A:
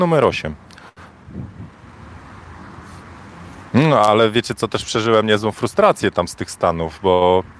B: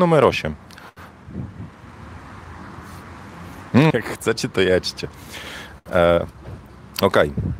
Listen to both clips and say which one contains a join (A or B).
B